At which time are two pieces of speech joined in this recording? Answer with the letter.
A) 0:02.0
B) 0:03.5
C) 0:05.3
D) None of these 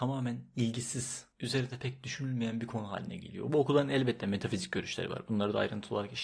D